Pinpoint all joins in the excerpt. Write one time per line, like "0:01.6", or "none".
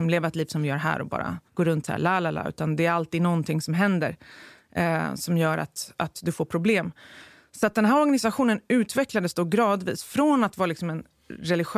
0:01.5

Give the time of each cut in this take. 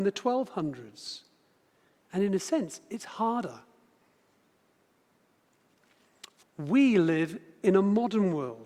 0:06.4

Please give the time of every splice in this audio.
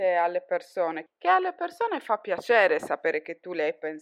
0:01.1

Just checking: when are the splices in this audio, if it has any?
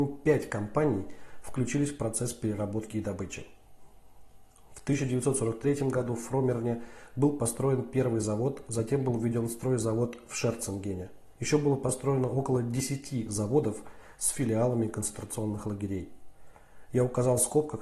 0:11.4

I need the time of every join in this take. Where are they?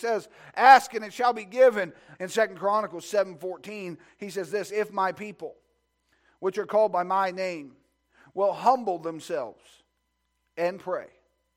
0:02.1

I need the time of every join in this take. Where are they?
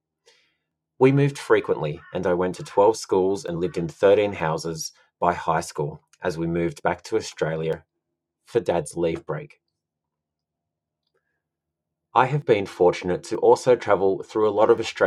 none

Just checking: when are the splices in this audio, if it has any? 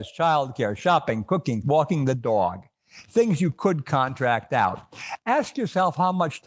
0:01.6

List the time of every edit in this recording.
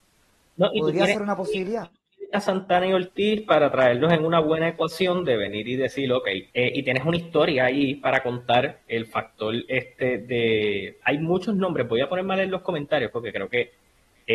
0:06.5
0:11.0

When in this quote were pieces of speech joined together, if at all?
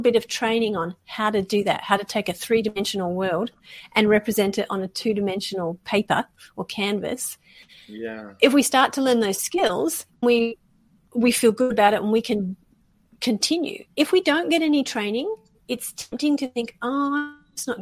0:10.2

